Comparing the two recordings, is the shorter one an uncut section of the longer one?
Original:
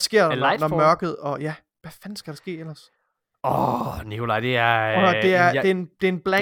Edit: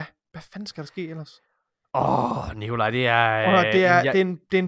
yes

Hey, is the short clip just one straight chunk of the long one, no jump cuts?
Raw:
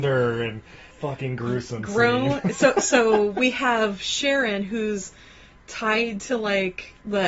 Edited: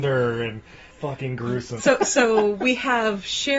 no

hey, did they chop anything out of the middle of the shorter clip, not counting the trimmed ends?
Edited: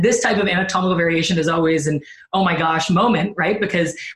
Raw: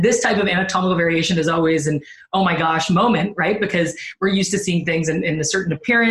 no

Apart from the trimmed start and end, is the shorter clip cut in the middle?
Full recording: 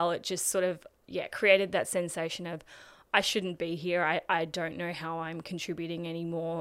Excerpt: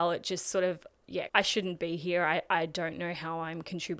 yes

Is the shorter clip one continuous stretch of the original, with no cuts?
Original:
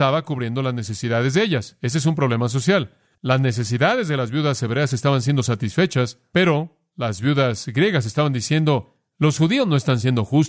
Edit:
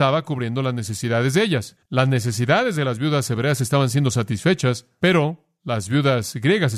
no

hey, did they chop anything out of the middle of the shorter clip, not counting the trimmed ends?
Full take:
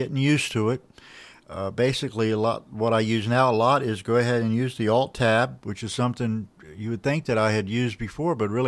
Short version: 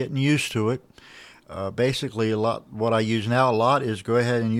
no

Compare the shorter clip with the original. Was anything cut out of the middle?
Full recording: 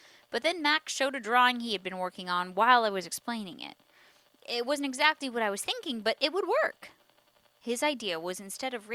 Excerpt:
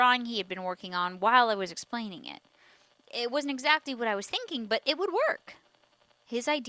no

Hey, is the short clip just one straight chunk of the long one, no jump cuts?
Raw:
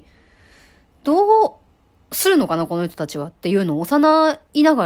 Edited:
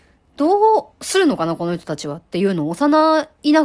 no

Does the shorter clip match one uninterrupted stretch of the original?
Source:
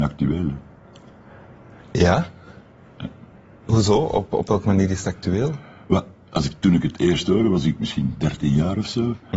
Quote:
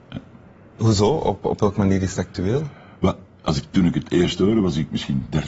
yes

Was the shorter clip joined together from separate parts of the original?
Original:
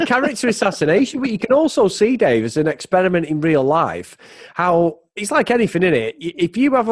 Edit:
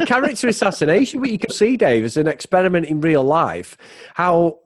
yes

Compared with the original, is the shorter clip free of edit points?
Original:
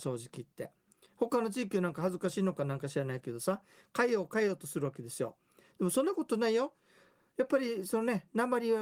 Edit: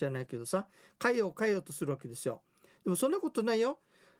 yes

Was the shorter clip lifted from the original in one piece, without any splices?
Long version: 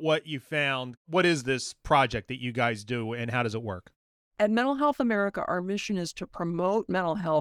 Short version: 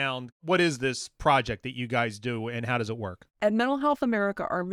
no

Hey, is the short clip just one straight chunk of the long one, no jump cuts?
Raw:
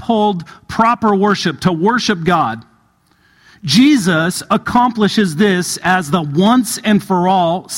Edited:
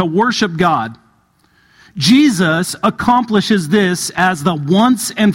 yes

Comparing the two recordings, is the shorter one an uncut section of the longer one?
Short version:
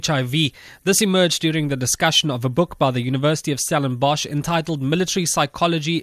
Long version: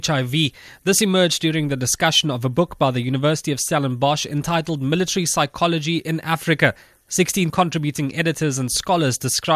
yes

